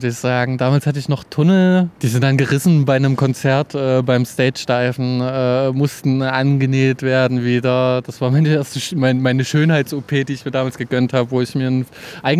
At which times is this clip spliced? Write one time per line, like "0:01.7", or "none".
none